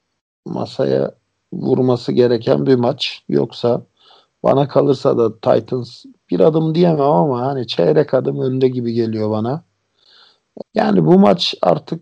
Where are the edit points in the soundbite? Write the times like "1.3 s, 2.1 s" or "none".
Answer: 10.6 s

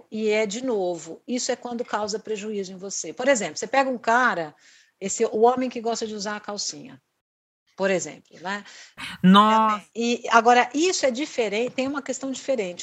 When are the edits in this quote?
9.0 s

